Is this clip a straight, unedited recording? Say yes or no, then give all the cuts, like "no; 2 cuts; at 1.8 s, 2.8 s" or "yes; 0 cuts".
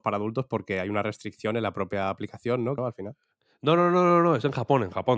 no; 1 cut; at 2.8 s